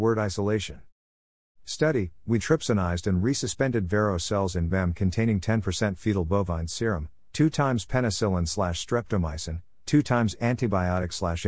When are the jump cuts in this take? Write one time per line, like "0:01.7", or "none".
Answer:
0:02.4